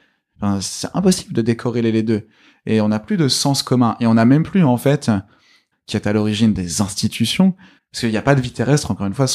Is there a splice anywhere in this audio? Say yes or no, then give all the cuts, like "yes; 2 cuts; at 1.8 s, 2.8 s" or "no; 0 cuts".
yes; 2 cuts; at 5.7 s, 7.8 s